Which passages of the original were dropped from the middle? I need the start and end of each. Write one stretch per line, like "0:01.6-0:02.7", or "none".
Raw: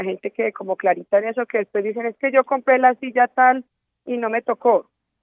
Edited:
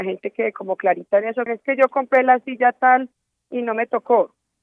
0:01.5-0:02.0